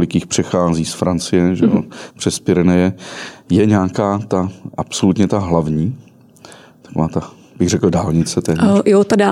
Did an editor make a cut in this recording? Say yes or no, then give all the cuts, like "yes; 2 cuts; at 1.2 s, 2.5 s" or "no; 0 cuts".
no; 0 cuts